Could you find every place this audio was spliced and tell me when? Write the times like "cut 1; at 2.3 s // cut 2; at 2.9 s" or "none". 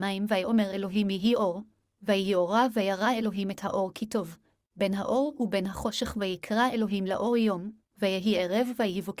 cut 1; at 4.7 s // cut 2; at 7.8 s